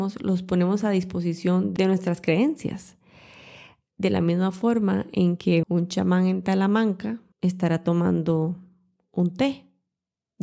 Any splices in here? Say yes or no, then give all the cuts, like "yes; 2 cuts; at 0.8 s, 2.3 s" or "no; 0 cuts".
yes; 2 cuts; at 5.6 s, 7.3 s